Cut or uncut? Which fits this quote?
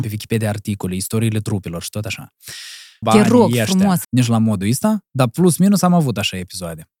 cut